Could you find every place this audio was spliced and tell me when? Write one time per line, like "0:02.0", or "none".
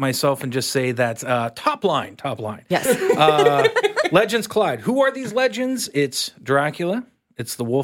none